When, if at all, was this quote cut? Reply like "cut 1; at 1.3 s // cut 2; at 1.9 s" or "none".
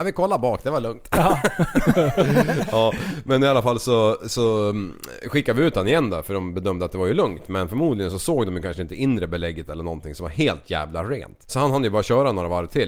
cut 1; at 11.5 s